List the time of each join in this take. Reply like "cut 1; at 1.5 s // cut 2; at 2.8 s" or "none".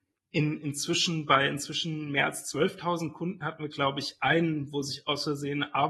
none

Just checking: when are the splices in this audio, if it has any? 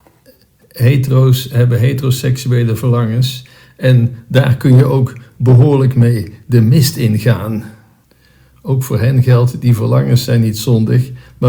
none

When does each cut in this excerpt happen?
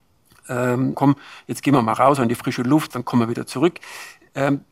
cut 1; at 0.9 s // cut 2; at 2.9 s

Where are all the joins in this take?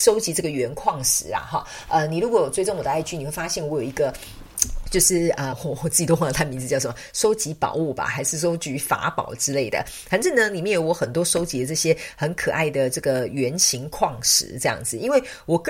cut 1; at 5.5 s

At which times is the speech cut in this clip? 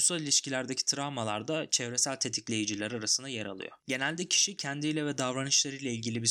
cut 1; at 3.8 s

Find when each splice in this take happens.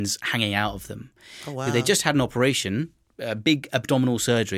none

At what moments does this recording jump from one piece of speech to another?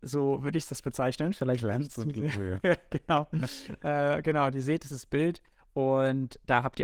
none

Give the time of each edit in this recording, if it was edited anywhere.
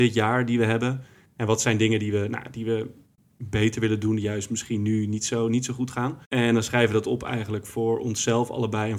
cut 1; at 6.2 s

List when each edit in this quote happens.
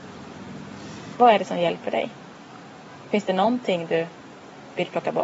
cut 1; at 1.1 s

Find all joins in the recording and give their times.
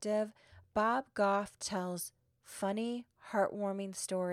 none

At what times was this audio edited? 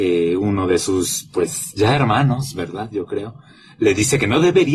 none

